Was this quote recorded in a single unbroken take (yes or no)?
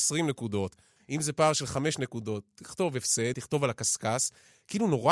no